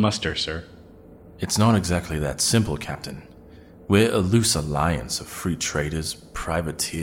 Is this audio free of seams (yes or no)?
yes